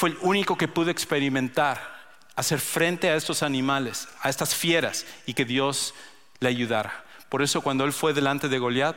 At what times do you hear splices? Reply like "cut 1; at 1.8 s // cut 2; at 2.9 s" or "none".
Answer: none